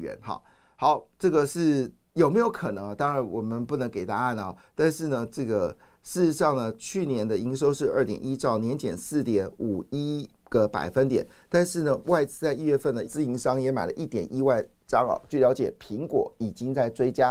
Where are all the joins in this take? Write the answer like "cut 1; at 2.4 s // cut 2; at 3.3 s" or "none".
cut 1; at 13.0 s // cut 2; at 15.3 s